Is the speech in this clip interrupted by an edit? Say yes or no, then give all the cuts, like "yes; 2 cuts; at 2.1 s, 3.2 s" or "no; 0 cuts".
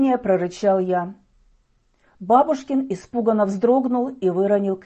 no; 0 cuts